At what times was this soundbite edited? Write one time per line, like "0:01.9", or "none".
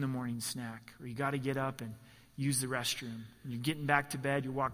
none